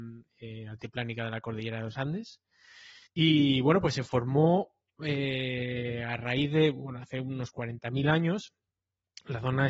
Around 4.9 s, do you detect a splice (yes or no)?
no